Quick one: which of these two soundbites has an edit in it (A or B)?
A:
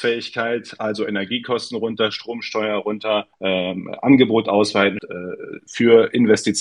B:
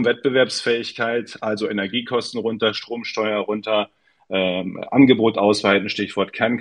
A